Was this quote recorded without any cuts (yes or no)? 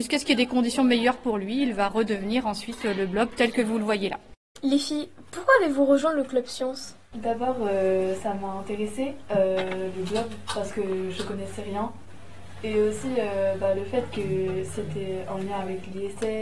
yes